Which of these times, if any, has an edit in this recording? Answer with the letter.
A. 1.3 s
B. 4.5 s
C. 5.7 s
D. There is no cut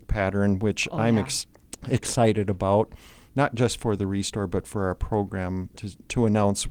C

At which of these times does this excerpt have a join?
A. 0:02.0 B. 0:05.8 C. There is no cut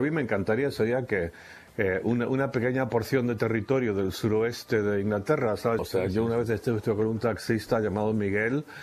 B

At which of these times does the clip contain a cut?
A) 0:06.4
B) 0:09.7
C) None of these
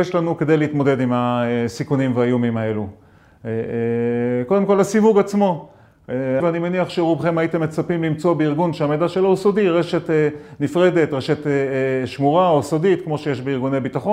A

